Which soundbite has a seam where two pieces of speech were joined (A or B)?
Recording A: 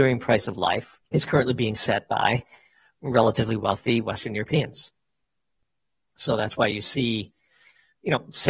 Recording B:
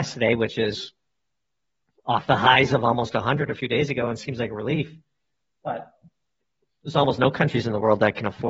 A